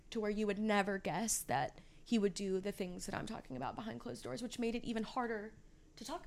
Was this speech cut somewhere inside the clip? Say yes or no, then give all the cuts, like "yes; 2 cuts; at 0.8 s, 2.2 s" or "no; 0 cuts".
no; 0 cuts